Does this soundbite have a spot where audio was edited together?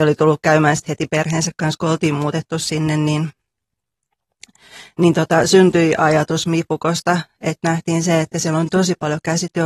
no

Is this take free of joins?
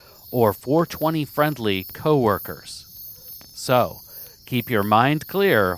yes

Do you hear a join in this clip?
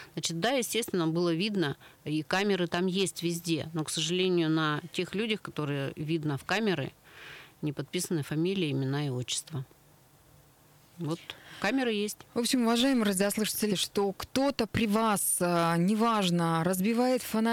yes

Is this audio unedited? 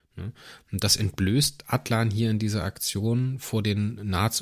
yes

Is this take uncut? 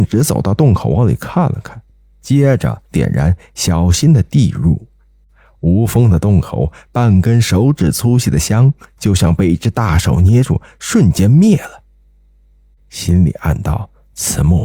no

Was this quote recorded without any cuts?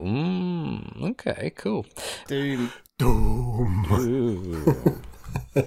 no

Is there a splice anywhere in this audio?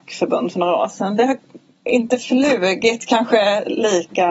no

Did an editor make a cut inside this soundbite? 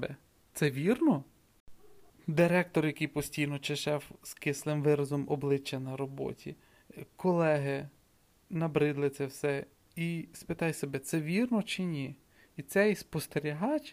yes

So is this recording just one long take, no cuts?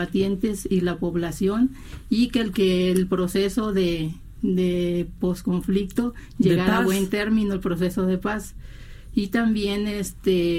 no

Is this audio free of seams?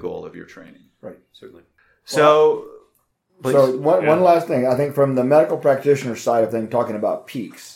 yes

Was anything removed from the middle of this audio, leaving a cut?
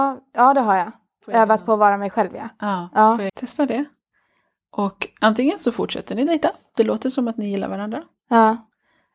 yes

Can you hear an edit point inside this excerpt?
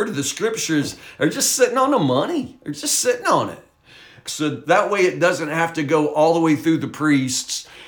yes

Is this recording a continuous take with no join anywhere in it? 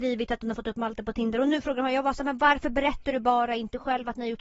yes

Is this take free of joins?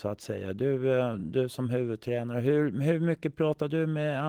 yes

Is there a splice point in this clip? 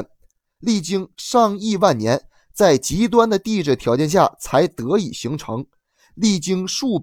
no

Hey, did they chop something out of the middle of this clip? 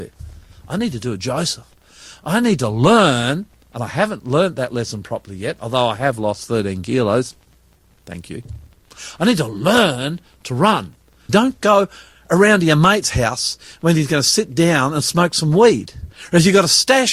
yes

